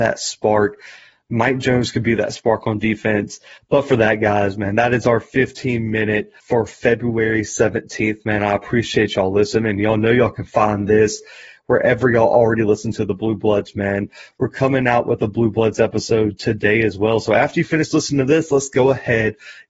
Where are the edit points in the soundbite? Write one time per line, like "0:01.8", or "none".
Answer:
0:03.6
0:06.4